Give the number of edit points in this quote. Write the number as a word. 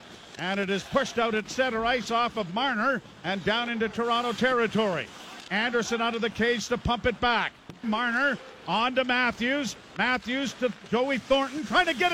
one